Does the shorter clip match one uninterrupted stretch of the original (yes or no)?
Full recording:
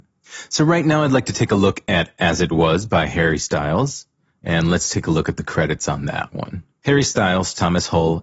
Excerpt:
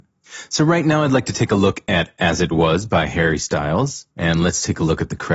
no